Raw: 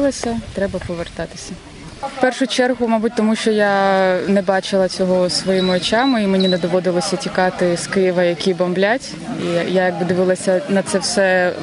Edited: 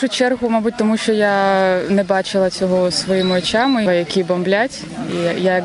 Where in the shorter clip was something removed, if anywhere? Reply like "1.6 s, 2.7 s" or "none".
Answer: 3.9 s